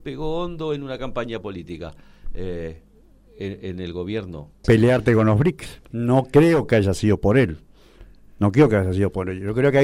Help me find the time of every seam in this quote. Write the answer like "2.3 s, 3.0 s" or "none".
4.6 s, 5.9 s